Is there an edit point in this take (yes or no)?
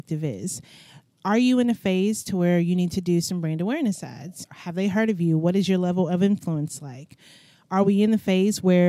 yes